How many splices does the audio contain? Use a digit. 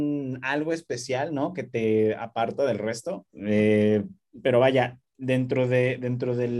2